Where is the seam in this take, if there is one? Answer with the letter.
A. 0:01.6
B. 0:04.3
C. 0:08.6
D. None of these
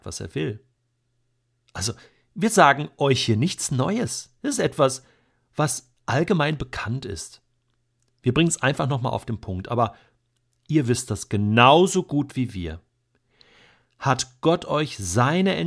A